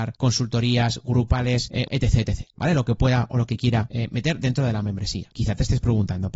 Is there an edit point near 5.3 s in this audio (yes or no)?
no